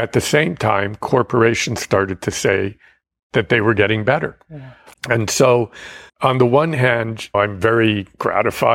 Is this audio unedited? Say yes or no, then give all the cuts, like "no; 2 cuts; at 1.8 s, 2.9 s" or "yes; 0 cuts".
no; 3 cuts; at 4.9 s, 6.1 s, 7.3 s